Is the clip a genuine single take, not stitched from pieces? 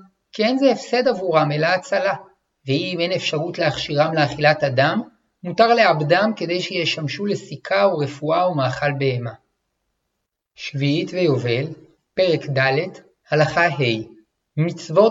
yes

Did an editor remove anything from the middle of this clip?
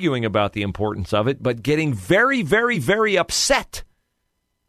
no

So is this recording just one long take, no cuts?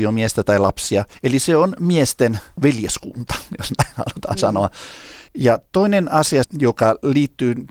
no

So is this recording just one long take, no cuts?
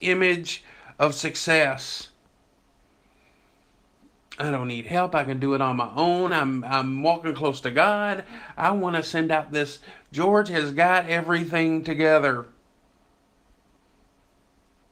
no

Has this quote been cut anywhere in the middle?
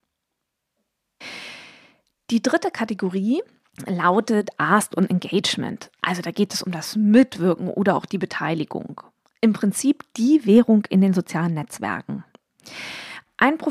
no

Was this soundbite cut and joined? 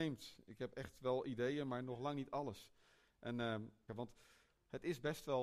yes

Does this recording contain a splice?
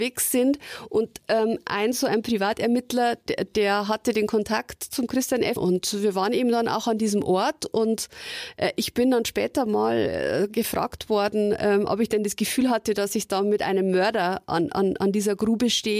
yes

